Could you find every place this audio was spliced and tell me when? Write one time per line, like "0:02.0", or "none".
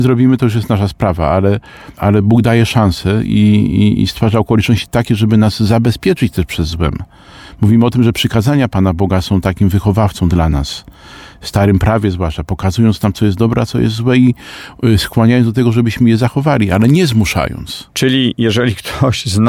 0:17.9